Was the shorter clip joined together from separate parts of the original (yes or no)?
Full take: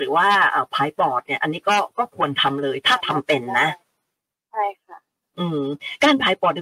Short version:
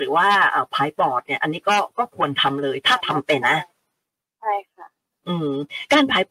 yes